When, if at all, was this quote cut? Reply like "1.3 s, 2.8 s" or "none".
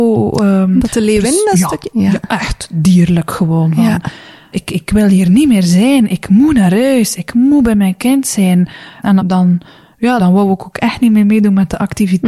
9.2 s, 10.2 s

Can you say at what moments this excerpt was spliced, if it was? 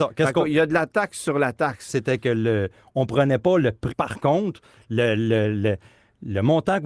1.9 s, 3.9 s

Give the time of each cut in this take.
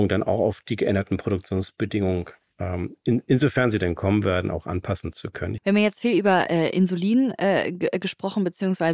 5.6 s

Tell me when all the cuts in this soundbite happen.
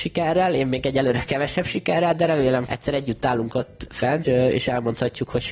2.7 s, 4.2 s

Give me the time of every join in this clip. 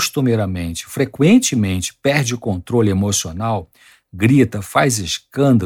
none

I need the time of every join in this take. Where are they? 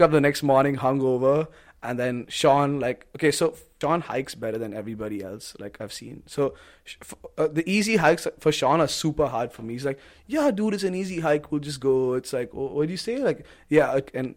none

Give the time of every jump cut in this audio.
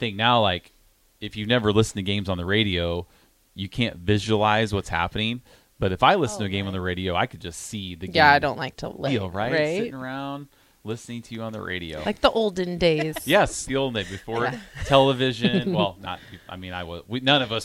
9.1 s, 13.7 s

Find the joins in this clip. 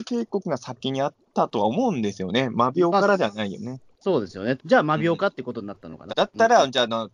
1.2 s, 4.6 s, 6.1 s

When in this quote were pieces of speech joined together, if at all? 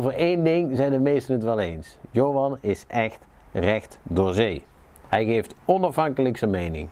none

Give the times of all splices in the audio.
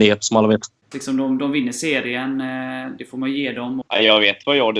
0.9 s, 3.8 s

